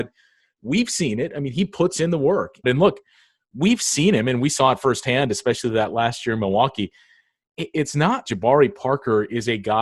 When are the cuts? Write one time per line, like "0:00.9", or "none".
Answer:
0:02.6
0:08.2

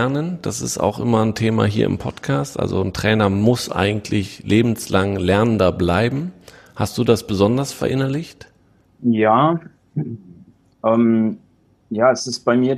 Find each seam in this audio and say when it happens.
none

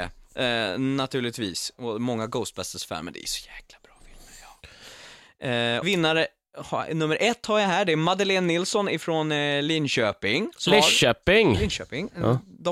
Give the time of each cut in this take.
0:05.8

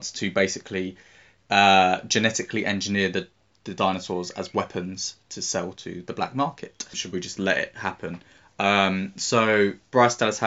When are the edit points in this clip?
0:06.9

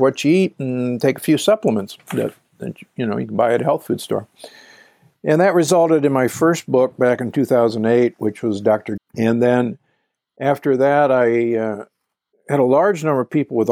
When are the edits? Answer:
0:09.0

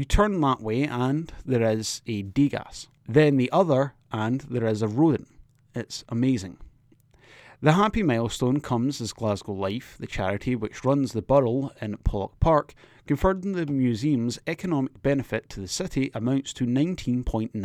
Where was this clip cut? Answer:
none

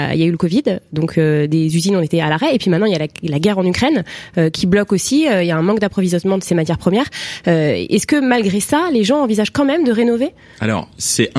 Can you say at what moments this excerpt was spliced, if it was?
none

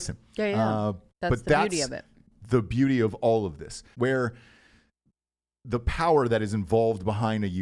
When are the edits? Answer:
0:03.9

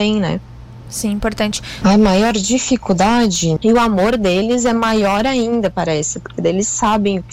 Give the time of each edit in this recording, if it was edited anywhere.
0:01.8
0:03.6

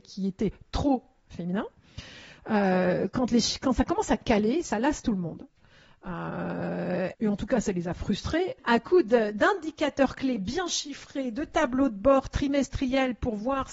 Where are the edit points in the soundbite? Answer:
0:07.1
0:08.6

